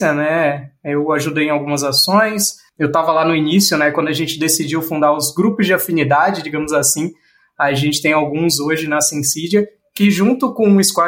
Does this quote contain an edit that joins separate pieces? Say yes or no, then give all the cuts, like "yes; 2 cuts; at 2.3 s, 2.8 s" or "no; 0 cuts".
no; 0 cuts